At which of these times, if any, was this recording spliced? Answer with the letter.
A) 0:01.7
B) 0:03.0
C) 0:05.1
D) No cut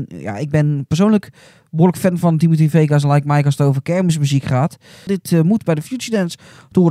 C